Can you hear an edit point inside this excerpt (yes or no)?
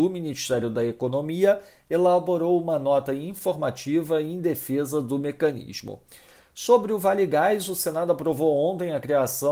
no